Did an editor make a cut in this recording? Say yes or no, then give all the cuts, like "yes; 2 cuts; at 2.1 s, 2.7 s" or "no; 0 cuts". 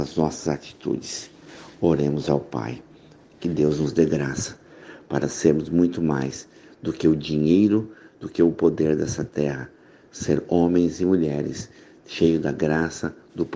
no; 0 cuts